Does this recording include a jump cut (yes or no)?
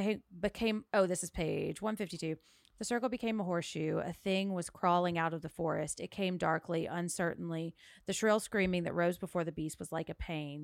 no